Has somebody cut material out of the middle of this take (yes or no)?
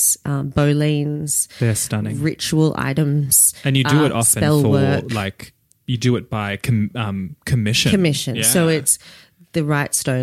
no